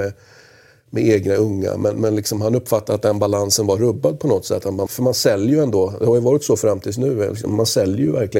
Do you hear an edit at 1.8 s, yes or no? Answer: no